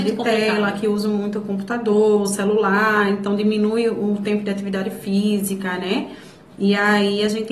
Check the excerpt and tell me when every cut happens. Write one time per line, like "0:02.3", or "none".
none